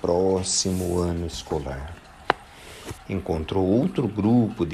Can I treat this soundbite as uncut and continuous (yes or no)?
no